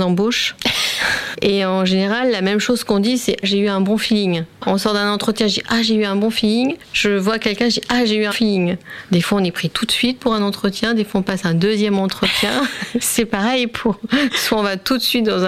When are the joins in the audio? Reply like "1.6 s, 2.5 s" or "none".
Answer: 1.3 s, 3.4 s, 8.3 s